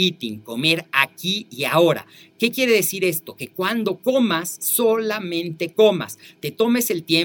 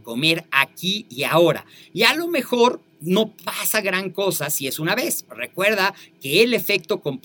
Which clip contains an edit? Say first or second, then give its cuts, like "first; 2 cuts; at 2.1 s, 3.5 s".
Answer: second; 2 cuts; at 1.8 s, 5.3 s